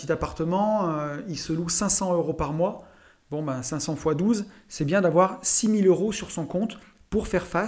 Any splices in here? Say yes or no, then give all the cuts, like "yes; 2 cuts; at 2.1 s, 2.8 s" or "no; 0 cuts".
no; 0 cuts